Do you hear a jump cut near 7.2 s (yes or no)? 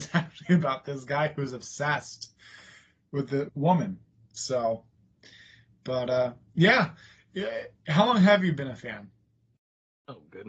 no